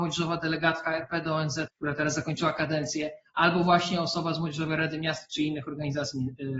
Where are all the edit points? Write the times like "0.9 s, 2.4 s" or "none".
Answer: 1.7 s